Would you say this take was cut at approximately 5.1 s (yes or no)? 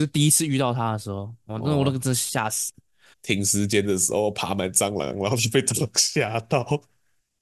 no